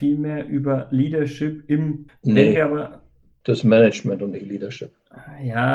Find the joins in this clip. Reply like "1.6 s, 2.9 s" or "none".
2.1 s